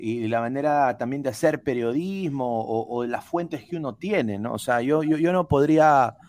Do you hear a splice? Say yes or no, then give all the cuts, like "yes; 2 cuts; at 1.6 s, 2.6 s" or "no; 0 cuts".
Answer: no; 0 cuts